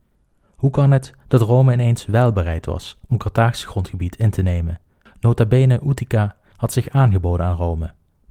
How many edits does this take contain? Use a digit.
2